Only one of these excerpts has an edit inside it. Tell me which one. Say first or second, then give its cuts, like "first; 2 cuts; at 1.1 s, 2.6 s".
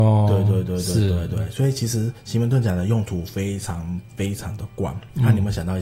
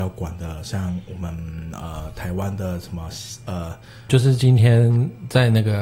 second; 1 cut; at 4.1 s